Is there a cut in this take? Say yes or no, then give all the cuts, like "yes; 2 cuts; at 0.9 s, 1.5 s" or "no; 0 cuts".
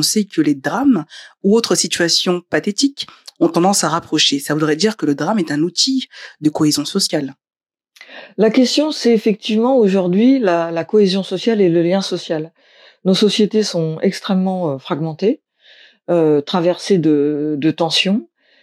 no; 0 cuts